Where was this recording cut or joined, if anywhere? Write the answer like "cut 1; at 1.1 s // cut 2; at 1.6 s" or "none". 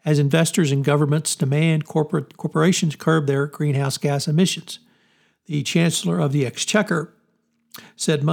none